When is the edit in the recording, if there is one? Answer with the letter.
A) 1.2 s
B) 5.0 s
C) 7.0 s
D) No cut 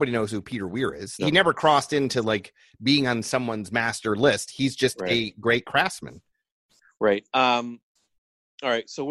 A